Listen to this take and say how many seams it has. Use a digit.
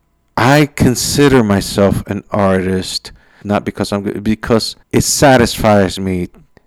2